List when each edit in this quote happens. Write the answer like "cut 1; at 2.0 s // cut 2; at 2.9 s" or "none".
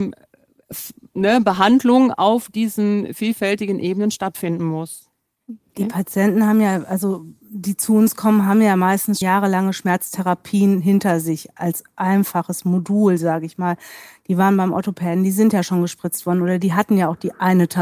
cut 1; at 9.2 s